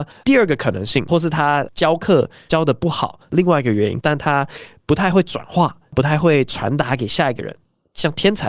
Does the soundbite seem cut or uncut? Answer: cut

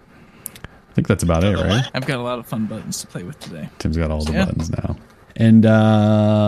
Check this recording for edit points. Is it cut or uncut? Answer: cut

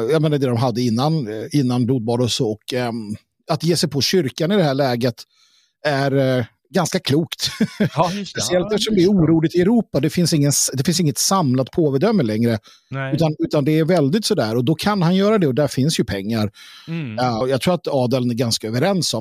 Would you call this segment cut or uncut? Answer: cut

